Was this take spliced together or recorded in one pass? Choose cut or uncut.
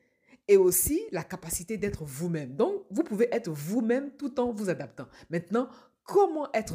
uncut